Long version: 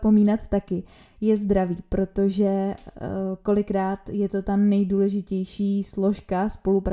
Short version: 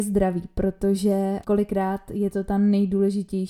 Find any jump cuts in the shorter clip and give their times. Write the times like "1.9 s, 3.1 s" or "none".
1.4 s